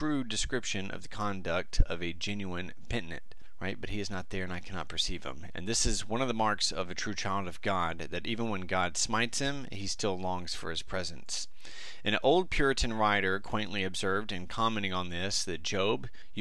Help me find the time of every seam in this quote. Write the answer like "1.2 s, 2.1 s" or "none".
5.5 s